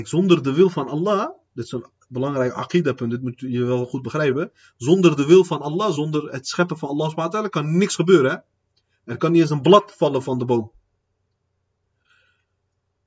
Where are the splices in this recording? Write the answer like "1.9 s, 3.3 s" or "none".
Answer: 6.0 s